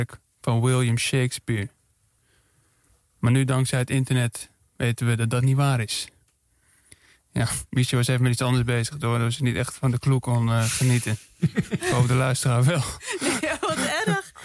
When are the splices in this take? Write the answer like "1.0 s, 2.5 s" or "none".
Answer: none